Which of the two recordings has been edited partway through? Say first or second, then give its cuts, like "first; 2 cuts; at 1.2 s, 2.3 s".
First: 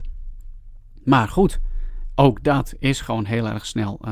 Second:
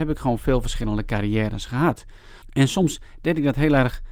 second; 1 cut; at 2.4 s